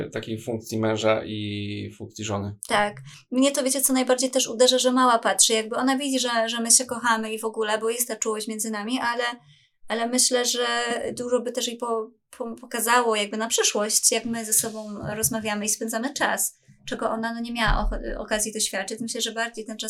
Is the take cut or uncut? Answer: uncut